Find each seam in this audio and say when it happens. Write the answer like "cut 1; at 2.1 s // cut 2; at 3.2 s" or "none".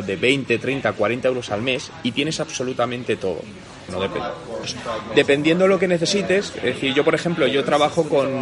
cut 1; at 3.9 s